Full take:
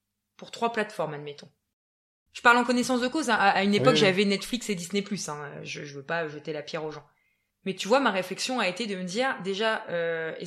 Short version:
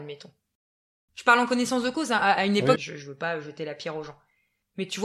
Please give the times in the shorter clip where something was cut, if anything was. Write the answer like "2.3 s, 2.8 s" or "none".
2.8 s